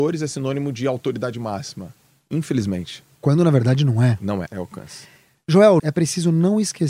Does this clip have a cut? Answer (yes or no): yes